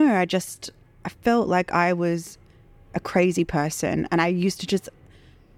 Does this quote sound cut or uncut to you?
uncut